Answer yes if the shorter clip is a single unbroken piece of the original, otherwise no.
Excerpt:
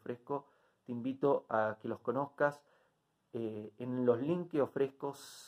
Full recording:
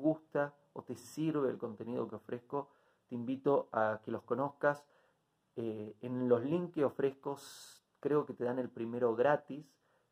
yes